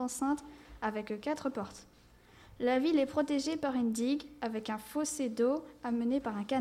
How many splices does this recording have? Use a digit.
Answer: 0